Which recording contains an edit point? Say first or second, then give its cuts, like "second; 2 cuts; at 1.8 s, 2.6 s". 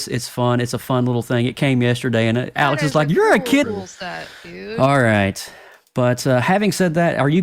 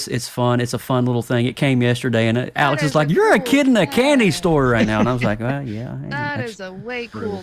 first; 1 cut; at 3.6 s